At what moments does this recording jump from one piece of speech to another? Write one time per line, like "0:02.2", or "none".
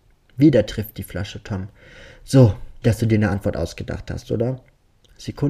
0:02.8